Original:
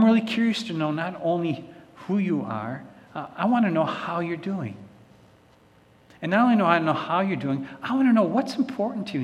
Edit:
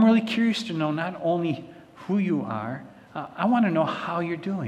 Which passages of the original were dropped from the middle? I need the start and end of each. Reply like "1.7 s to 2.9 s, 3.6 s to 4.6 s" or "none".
none